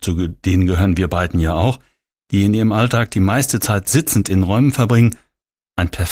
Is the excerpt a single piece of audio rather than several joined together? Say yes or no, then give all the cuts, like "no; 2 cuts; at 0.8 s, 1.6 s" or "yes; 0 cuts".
yes; 0 cuts